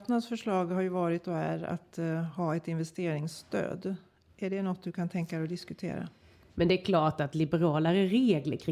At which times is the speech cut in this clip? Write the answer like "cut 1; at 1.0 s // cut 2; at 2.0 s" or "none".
cut 1; at 6.5 s